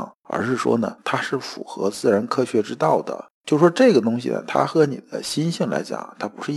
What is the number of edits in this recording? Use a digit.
2